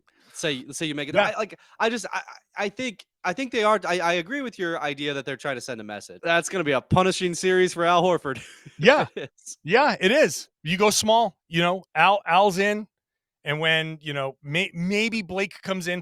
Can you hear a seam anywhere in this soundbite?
yes; 1 cut; at 6.2 s

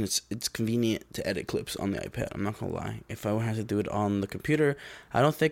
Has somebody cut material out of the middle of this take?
no; 0 cuts

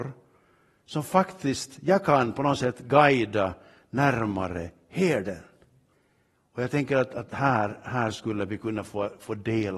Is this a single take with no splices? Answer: yes; 0 cuts

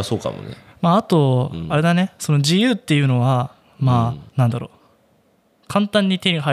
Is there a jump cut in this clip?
yes; 1 cut; at 4.3 s

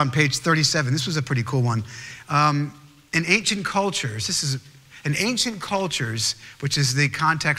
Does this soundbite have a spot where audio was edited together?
no; 0 cuts

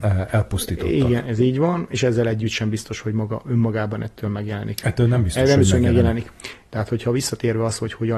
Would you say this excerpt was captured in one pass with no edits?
no; 1 cut; at 6.7 s

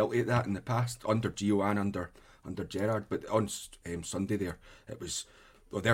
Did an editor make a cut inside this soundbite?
no; 0 cuts

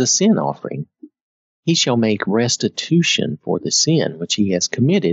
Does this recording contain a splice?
yes; 1 cut; at 1.5 s

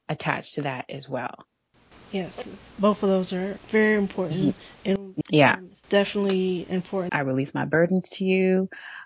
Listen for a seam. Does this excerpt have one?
yes; 2 cuts; at 5.2 s, 7.1 s

